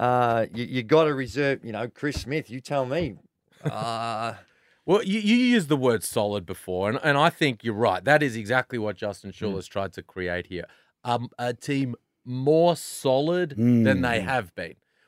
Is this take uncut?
yes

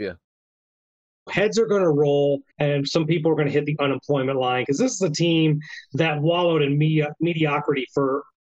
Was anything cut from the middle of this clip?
yes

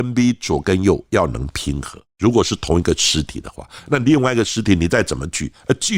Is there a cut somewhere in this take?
yes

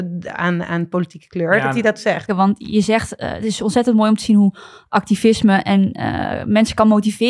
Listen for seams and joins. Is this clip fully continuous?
no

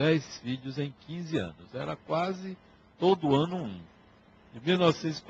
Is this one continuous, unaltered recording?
yes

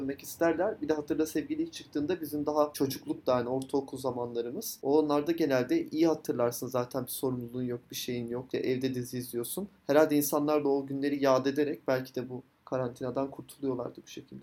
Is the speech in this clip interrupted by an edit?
no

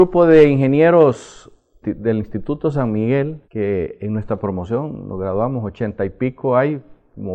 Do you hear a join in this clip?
yes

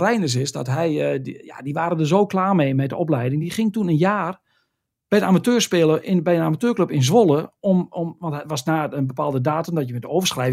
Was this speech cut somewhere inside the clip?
no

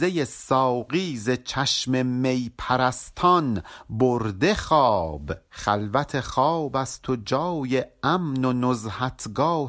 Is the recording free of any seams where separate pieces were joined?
no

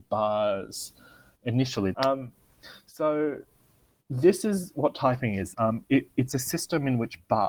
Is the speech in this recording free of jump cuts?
no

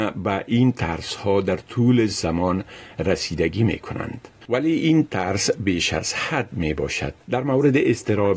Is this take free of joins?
no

